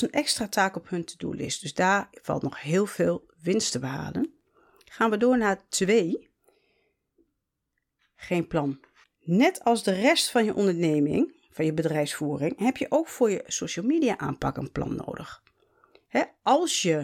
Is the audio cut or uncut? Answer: cut